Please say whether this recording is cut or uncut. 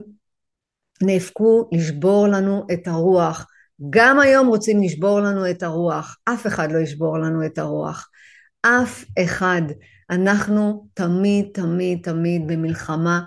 uncut